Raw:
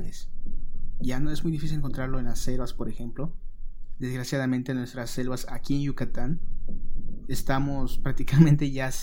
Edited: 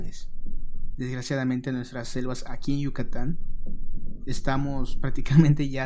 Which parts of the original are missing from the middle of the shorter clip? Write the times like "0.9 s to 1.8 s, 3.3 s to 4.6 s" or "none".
0.9 s to 4.0 s